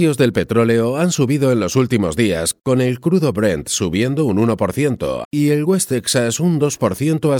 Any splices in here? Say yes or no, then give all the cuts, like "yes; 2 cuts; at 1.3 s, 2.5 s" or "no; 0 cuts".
yes; 1 cut; at 5.2 s